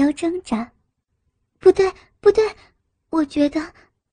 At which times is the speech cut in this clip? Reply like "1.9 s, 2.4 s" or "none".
none

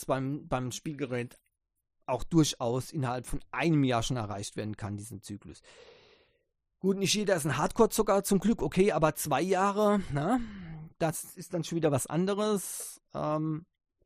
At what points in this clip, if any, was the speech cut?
none

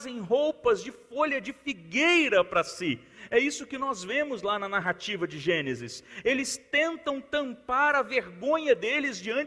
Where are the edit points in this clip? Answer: none

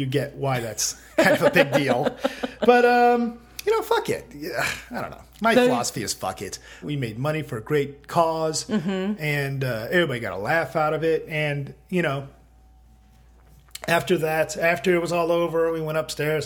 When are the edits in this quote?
6.8 s

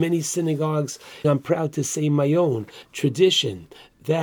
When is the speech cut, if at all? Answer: 1.2 s, 2.8 s

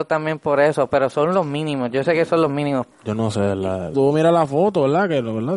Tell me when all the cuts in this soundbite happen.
2.9 s, 3.9 s

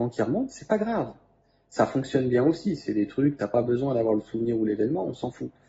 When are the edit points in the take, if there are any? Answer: none

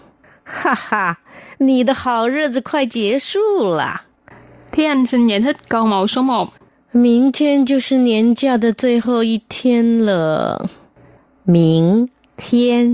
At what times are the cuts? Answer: none

